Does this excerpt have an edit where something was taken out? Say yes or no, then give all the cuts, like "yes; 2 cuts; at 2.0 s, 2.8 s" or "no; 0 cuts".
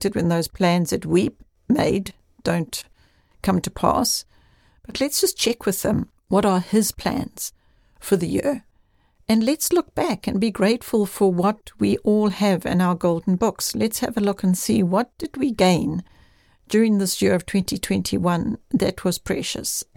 yes; 1 cut; at 6.2 s